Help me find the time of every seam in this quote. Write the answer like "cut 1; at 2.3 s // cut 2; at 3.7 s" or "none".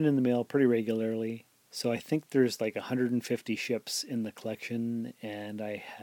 cut 1; at 1.6 s